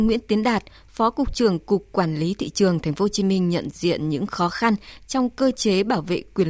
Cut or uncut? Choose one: uncut